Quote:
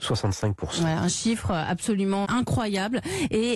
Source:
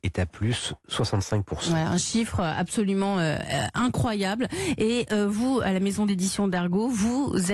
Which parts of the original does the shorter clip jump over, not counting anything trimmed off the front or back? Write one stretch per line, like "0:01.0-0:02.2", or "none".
0:03.1-0:03.7